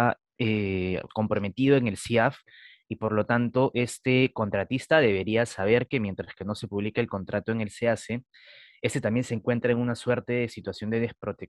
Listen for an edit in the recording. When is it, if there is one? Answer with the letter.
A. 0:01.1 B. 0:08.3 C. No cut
A